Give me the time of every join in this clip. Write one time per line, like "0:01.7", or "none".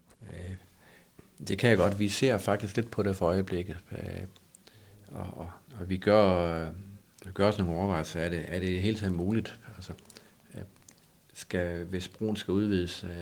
none